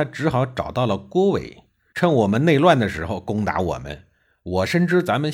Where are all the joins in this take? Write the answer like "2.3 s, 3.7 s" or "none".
1.9 s